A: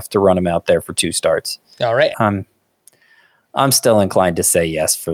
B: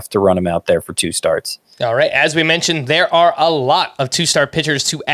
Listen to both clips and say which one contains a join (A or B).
A